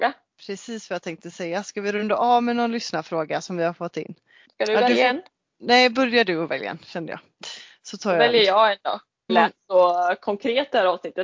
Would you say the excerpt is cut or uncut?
cut